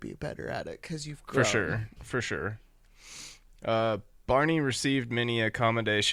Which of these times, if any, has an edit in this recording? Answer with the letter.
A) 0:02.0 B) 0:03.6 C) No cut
A